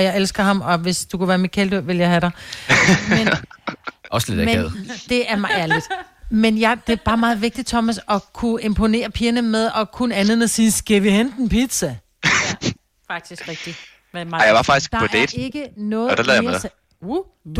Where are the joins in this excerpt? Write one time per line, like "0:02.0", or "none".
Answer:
none